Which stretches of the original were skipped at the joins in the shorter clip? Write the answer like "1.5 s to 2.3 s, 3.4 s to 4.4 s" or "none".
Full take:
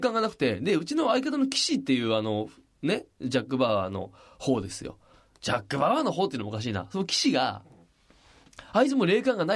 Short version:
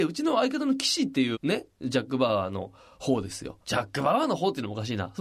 2.1 s to 2.7 s, 5.0 s to 5.4 s